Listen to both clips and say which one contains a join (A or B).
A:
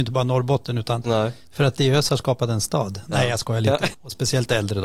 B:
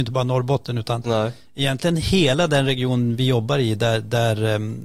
A